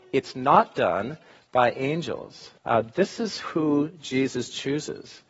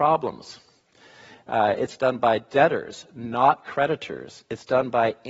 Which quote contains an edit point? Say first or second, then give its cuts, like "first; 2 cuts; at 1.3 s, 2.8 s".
first; 1 cut; at 2.6 s